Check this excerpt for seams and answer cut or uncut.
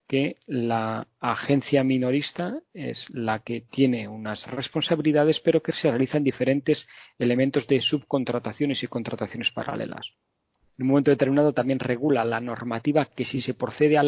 cut